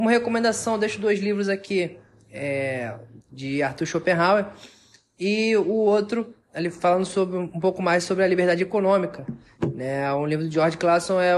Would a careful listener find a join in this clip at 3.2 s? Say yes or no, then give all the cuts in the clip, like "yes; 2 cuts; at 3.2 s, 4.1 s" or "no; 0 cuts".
yes; 1 cut; at 3.2 s